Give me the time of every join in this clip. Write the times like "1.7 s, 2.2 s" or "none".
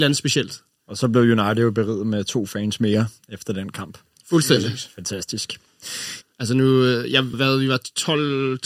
6.2 s, 7.3 s